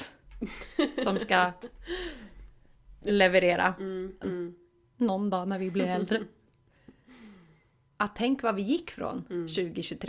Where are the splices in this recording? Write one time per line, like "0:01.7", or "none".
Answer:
0:04.2